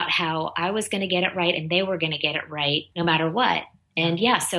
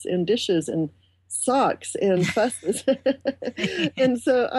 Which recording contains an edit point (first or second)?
first